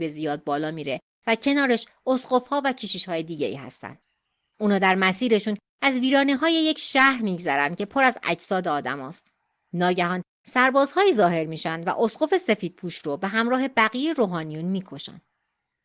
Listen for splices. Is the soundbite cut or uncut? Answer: cut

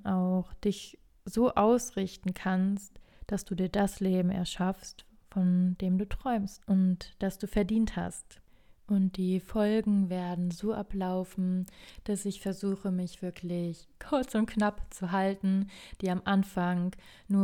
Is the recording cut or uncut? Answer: uncut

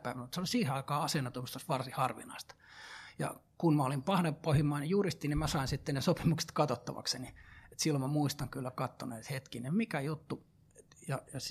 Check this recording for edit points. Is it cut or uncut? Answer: uncut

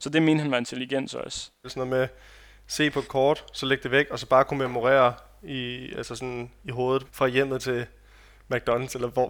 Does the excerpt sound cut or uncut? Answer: cut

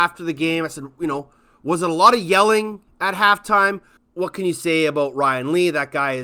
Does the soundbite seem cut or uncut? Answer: cut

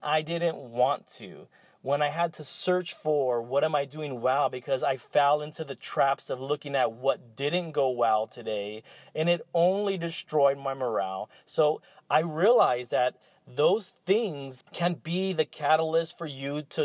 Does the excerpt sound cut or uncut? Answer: cut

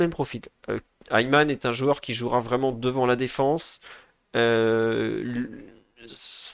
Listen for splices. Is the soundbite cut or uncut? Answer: uncut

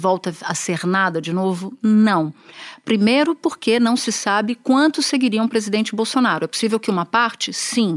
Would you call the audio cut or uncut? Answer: uncut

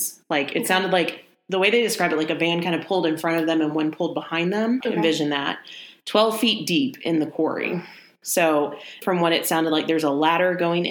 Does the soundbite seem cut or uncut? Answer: cut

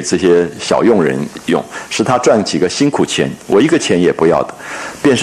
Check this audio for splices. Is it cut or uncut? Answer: uncut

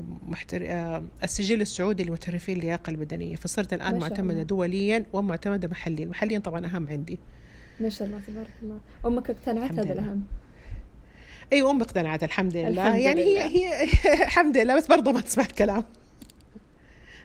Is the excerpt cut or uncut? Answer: uncut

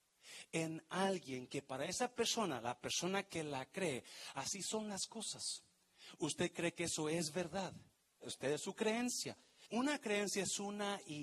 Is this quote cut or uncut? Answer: cut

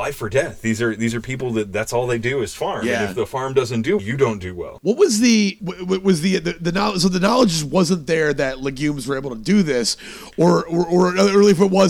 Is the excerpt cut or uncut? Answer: cut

